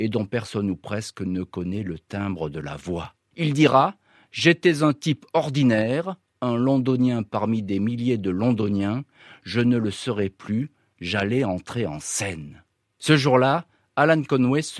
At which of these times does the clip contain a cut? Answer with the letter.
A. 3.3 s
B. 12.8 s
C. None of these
A